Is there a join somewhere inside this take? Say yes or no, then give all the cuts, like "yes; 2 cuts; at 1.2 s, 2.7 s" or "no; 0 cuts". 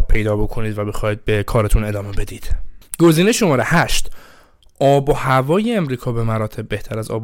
no; 0 cuts